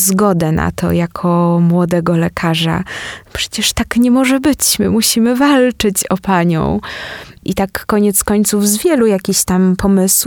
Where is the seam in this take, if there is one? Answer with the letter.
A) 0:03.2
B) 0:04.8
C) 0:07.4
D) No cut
C